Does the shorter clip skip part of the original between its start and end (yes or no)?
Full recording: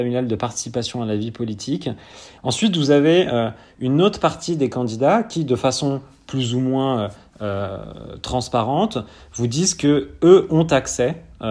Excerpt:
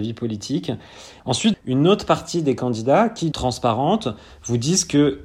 yes